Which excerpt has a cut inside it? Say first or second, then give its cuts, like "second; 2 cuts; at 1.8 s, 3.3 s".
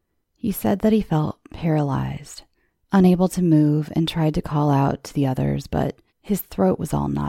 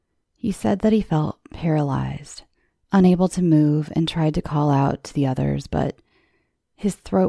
first; 1 cut; at 6.1 s